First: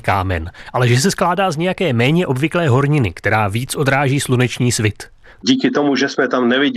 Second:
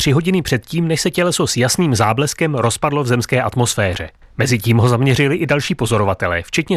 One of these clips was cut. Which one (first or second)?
first